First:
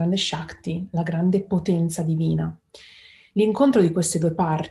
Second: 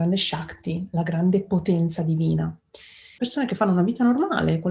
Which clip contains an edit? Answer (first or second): second